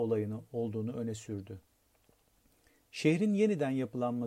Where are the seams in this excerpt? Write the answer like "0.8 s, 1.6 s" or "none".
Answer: none